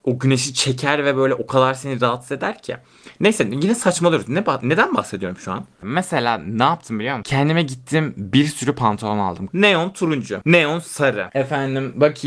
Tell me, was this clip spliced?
yes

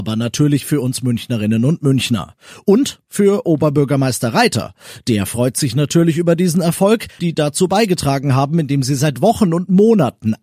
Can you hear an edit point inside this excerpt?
yes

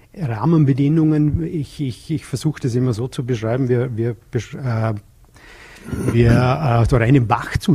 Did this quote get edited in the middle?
no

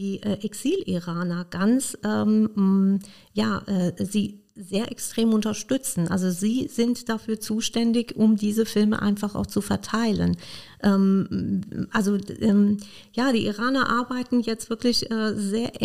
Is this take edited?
no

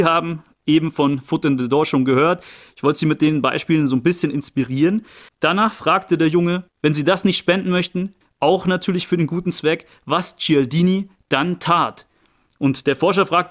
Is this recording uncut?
no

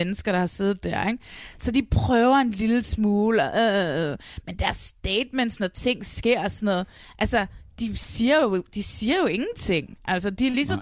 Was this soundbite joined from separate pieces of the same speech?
no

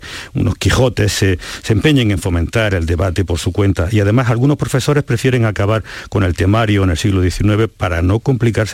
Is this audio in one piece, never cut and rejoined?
yes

